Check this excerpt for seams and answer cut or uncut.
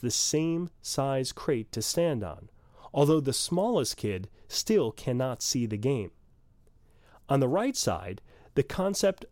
uncut